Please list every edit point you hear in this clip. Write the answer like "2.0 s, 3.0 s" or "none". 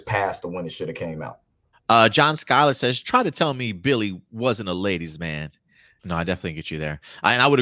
1.7 s, 6.0 s